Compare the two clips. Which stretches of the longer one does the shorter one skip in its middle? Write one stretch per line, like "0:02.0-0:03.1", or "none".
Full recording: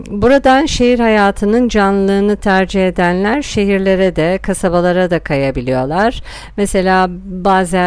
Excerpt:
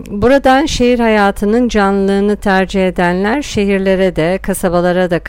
none